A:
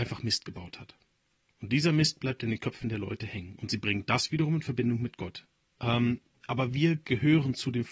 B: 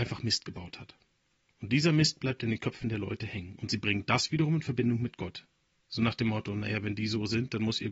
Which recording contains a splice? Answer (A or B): A